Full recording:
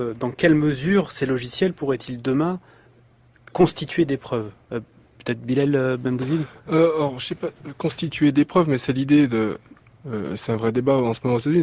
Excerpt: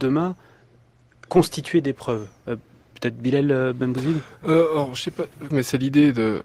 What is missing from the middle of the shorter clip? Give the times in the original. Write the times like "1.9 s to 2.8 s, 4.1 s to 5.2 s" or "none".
7.7 s to 8.7 s